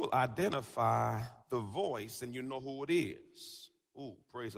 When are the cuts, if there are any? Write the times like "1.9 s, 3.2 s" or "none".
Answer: 1.4 s